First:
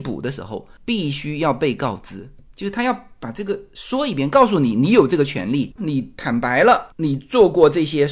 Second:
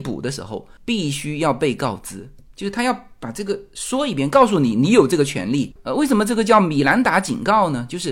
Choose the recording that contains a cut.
first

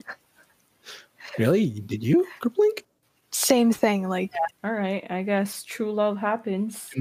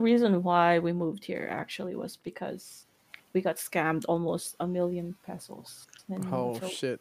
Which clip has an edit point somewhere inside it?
first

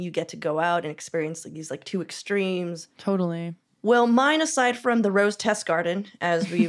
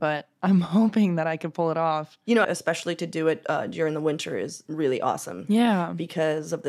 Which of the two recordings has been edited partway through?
second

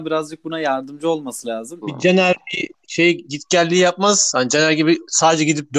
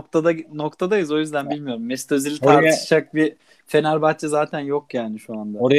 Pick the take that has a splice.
first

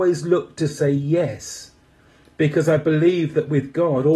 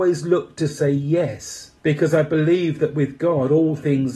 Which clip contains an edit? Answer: second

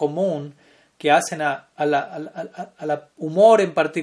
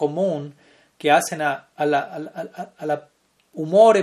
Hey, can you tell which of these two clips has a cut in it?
first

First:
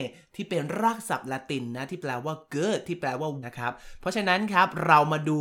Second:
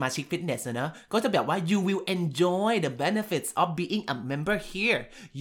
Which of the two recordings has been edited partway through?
first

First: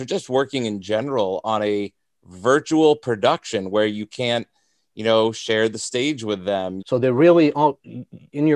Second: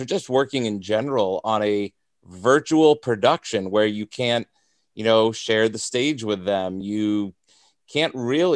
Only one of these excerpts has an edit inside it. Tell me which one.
first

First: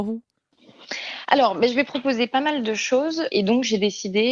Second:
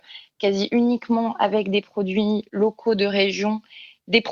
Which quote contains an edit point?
first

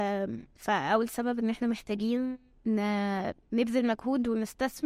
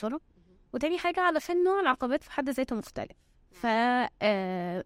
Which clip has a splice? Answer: first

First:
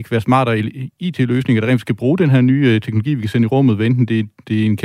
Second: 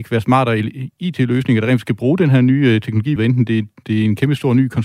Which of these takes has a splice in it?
second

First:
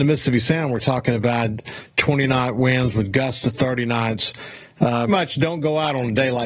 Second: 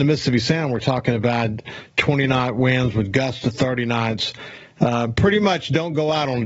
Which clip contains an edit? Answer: first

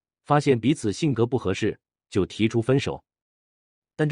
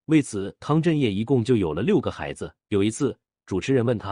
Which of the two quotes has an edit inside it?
second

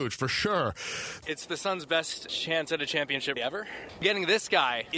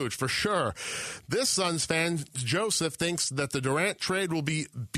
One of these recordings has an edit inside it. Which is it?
first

